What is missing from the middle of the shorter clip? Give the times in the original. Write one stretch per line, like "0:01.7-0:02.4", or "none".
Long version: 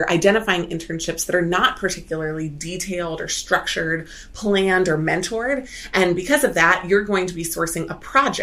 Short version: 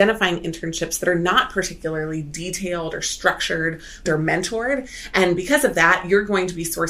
0:04.3-0:04.8